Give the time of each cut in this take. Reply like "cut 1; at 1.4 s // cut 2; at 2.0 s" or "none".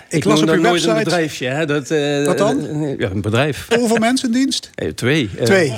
cut 1; at 3.7 s